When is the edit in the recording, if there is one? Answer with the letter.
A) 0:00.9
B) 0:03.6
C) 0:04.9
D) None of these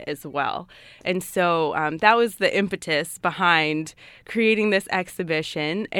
D